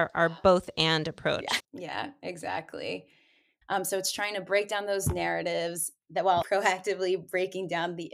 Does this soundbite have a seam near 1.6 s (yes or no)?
yes